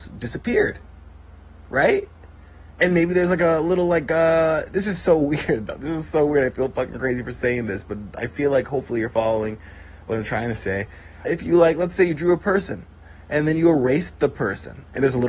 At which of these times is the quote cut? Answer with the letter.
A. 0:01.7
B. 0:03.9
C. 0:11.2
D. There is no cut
C